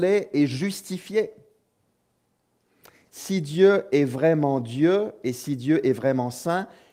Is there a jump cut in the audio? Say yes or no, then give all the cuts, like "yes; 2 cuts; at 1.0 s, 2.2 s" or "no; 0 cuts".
no; 0 cuts